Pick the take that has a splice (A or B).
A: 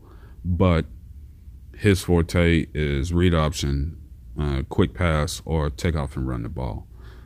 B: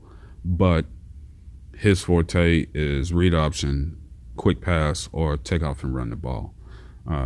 B